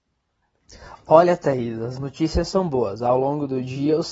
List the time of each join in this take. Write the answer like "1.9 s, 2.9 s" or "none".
none